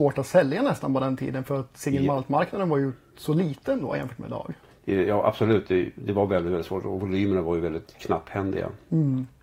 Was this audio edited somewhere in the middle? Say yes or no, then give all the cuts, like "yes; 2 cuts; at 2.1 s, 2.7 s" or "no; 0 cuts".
no; 0 cuts